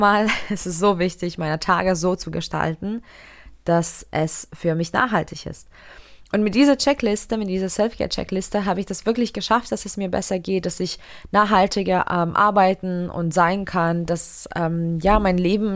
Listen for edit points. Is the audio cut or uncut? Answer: uncut